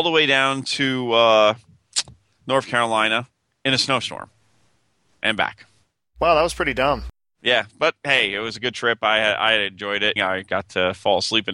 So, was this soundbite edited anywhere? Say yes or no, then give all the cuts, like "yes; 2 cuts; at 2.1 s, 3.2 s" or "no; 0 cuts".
yes; 1 cut; at 10.2 s